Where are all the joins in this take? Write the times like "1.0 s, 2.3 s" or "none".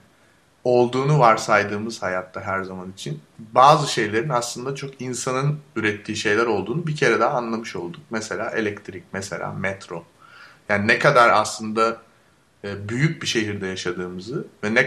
none